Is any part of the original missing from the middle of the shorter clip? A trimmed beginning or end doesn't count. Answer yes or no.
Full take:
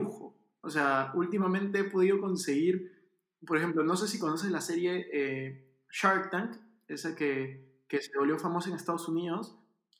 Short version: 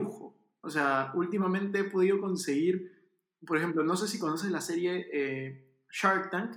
no